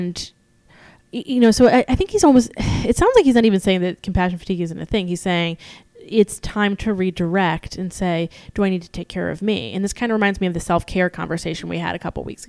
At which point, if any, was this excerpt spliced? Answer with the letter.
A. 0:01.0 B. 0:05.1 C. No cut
C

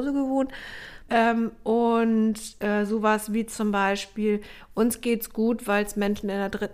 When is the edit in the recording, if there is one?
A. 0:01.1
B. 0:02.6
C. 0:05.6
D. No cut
A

